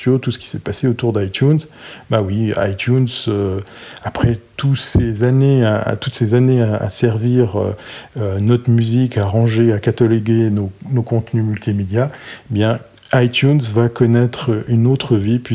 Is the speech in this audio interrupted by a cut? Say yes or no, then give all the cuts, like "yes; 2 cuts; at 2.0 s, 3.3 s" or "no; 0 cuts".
no; 0 cuts